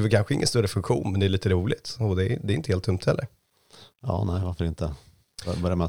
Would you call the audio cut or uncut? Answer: uncut